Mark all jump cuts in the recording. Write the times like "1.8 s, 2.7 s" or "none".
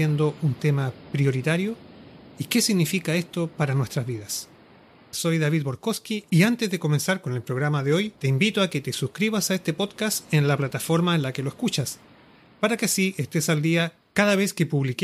5.1 s, 8.2 s

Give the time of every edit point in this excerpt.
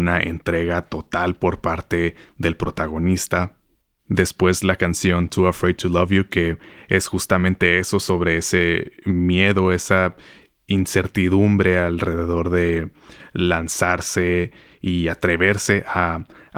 none

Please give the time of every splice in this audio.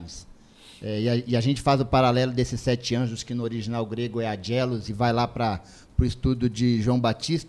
none

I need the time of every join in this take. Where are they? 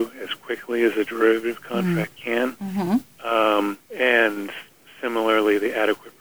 3.8 s

